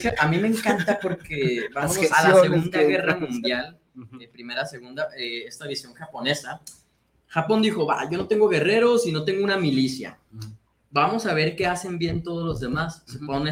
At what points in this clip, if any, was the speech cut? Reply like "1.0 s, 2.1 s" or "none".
2.1 s